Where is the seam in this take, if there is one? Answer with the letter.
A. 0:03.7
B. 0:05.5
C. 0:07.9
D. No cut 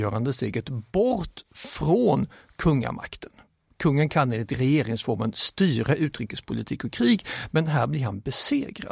D